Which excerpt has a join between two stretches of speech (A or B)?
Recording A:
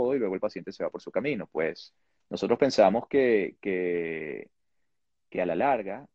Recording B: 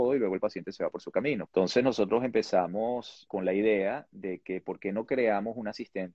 B